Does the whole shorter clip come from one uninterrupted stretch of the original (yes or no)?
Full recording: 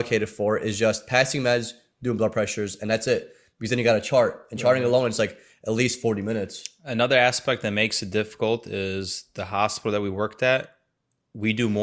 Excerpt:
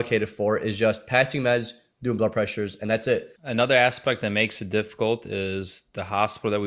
no